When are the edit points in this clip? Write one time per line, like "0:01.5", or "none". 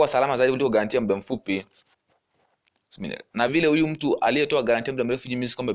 0:03.5